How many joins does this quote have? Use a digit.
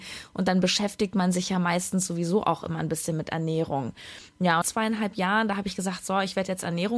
1